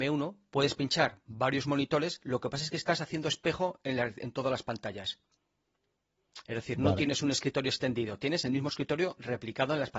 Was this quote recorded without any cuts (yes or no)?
yes